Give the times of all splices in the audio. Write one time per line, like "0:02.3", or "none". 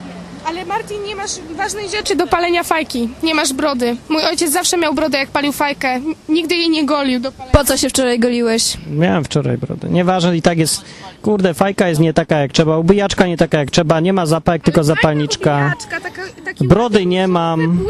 none